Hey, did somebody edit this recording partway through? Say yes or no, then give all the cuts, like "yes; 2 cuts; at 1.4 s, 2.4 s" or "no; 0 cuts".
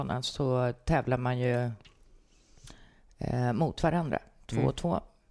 no; 0 cuts